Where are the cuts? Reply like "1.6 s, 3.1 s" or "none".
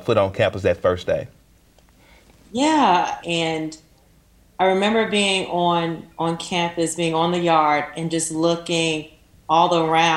3.2 s